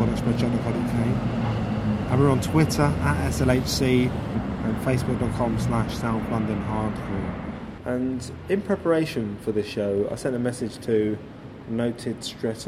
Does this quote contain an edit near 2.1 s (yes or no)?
no